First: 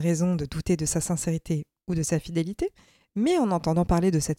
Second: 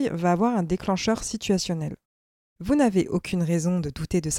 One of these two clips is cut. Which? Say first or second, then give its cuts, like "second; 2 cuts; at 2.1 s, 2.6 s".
second; 1 cut; at 2.4 s